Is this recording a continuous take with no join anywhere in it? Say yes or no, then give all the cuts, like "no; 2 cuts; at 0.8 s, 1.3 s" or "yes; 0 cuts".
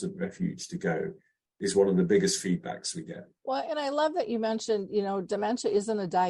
no; 1 cut; at 3.4 s